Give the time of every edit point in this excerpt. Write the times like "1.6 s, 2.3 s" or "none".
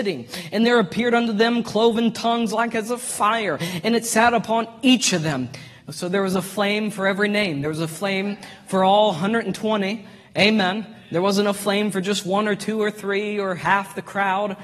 none

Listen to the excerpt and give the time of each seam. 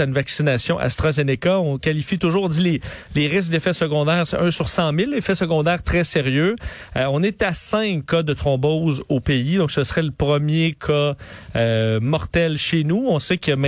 none

